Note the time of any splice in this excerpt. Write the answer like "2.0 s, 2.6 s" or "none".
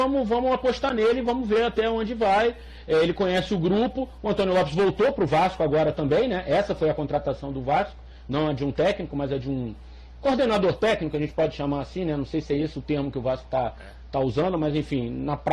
none